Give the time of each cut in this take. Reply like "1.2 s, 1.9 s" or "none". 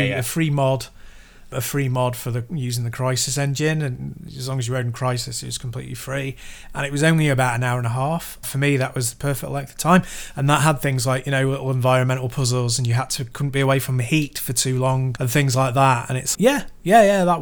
8.4 s, 15.2 s, 16.3 s